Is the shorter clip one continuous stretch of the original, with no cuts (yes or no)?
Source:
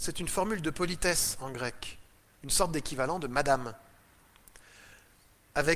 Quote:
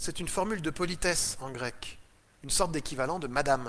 yes